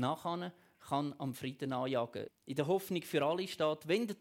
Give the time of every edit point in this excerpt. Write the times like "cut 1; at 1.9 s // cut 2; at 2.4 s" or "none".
cut 1; at 2.3 s